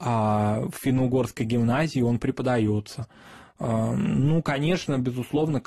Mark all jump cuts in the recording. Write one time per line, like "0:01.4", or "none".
none